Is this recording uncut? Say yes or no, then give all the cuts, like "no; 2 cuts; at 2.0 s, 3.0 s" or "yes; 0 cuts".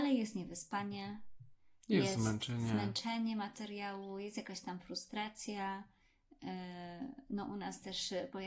yes; 0 cuts